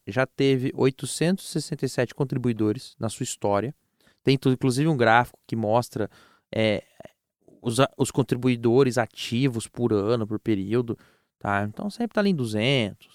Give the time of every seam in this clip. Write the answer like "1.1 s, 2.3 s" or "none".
none